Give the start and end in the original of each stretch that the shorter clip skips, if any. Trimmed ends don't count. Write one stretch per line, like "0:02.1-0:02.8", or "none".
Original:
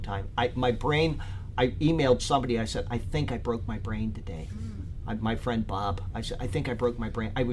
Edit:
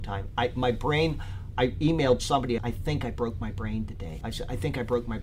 0:02.6-0:02.8
0:04.5-0:06.1